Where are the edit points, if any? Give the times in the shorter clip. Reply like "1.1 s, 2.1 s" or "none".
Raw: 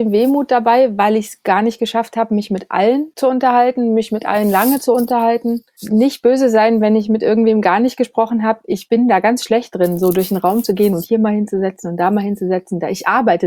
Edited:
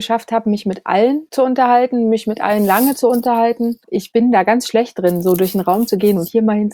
3.8 s